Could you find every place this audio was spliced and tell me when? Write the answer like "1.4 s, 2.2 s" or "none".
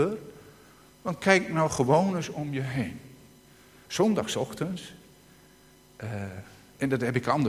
none